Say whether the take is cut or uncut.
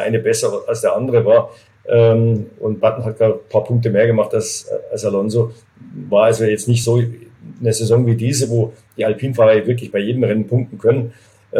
uncut